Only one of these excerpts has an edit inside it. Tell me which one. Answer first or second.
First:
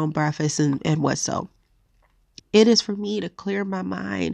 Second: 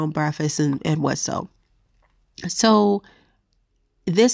first